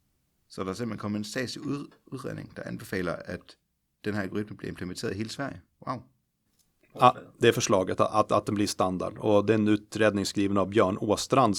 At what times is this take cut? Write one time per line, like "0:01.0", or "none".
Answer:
0:06.9